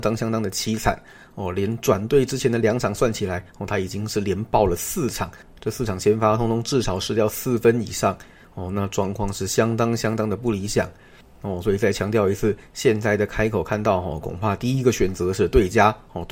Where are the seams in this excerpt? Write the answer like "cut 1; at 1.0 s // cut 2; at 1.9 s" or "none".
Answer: none